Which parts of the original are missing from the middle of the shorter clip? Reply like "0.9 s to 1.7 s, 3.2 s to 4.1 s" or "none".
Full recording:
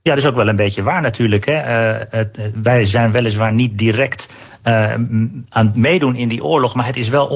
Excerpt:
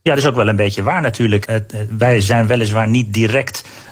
1.5 s to 2.1 s